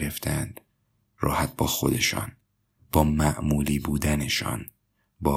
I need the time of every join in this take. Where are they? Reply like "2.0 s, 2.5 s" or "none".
1.0 s

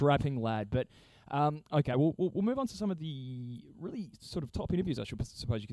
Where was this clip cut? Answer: none

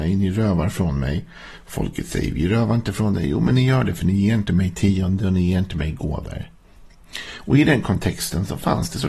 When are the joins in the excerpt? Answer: none

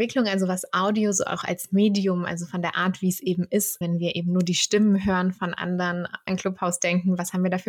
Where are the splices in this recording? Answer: 3.8 s, 6.3 s

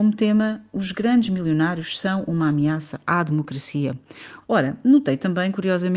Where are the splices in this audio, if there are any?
4.4 s

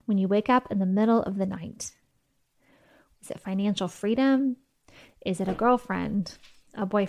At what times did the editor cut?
3.1 s

